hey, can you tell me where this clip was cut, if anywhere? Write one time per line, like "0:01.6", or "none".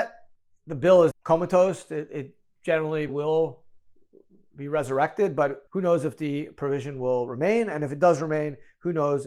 0:01.1
0:03.1
0:05.7